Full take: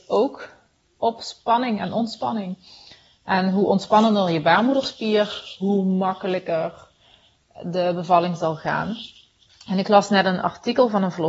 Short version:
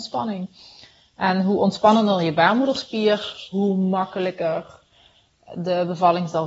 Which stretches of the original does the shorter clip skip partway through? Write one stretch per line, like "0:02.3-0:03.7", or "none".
none

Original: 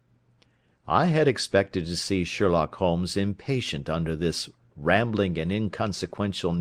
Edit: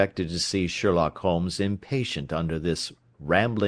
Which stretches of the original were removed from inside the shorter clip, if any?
none

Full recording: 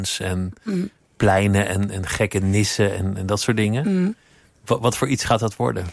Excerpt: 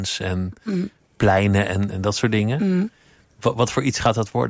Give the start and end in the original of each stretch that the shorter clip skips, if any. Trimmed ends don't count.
0:01.9-0:03.2

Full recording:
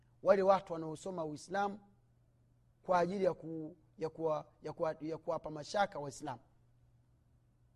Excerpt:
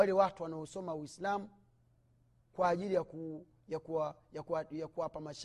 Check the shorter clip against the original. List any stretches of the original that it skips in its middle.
none

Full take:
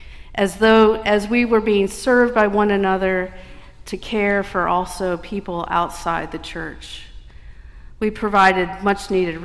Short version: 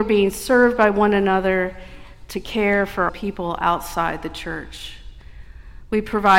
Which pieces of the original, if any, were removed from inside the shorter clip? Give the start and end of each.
0:04.7-0:05.2

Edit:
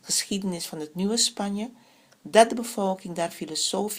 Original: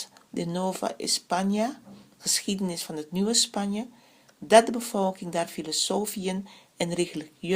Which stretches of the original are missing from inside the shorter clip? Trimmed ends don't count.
none

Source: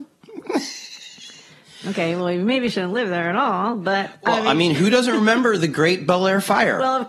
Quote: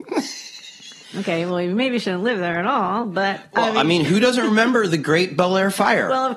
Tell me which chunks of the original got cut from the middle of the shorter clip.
0:01.4-0:01.7

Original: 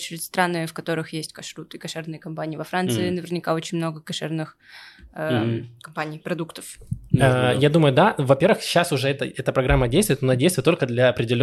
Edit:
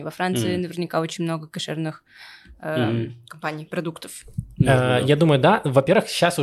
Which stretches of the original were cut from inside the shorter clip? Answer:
none

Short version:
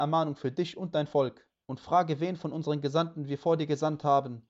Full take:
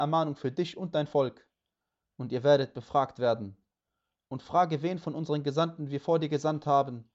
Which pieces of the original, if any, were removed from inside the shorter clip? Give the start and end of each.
0:01.6-0:04.3

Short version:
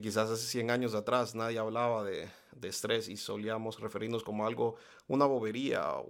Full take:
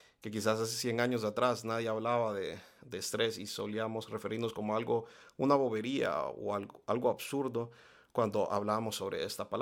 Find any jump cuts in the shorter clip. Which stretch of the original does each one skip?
none

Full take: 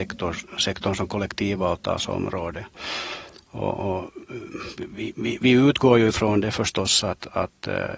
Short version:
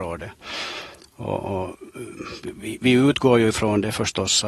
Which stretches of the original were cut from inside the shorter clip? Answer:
0:05.1-0:05.4

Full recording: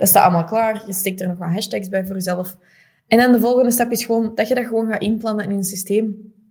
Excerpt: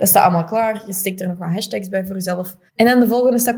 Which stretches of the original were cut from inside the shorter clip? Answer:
0:02.7-0:03.0

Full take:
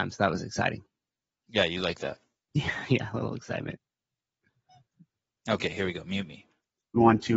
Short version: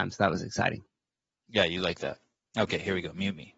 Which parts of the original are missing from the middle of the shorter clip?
0:02.4-0:05.3

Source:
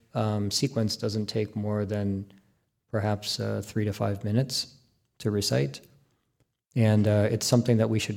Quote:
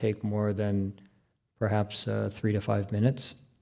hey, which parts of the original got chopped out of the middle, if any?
none

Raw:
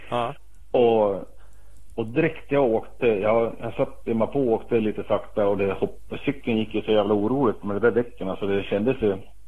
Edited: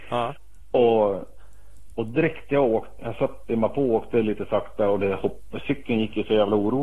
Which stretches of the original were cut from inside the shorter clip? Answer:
0:03.0-0:03.6

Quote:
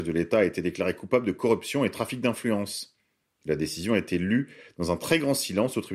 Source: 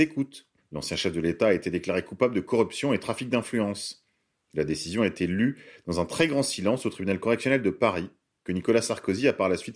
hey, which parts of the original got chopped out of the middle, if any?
none

